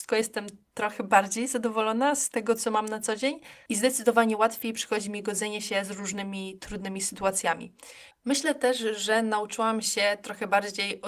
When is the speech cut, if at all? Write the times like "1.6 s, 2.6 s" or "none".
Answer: 8.1 s